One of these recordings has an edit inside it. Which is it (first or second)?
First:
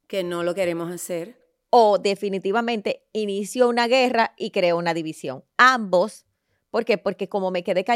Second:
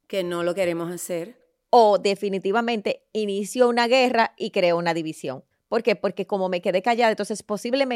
second